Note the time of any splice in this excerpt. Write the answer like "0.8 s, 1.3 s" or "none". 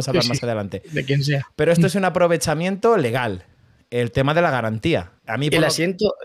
5.2 s